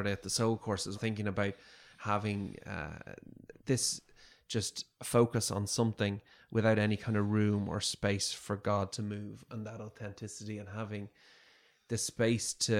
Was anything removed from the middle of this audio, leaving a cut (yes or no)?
yes